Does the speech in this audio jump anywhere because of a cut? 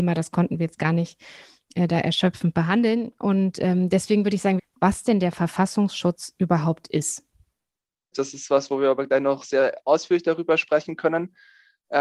yes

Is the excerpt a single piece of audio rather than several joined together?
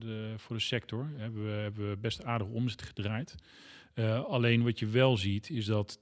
yes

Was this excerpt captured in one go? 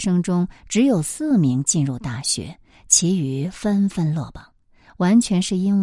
yes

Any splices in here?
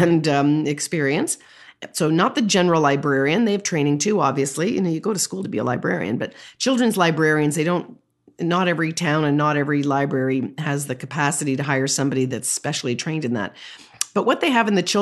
no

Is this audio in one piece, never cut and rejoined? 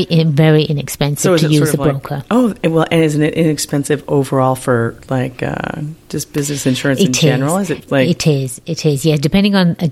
yes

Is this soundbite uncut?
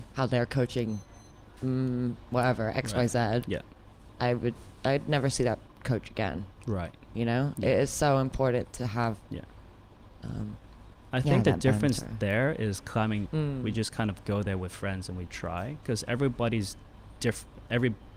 no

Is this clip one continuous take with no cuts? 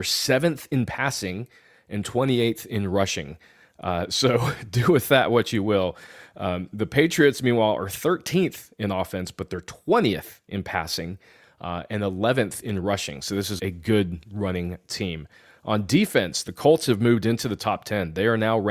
no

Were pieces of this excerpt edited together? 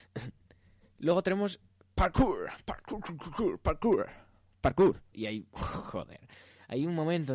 yes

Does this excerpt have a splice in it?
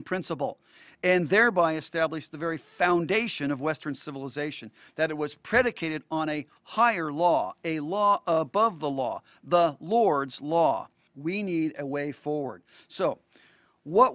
yes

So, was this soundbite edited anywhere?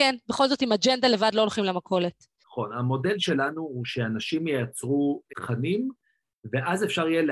yes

